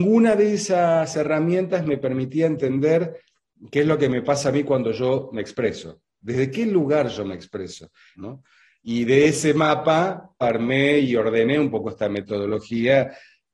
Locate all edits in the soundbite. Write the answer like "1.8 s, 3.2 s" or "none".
6.2 s, 8.2 s, 10.4 s